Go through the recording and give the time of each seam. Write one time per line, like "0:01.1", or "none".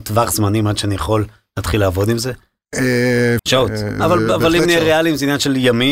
0:03.4